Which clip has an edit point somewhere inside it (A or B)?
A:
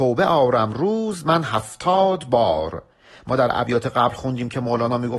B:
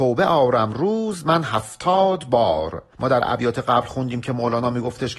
B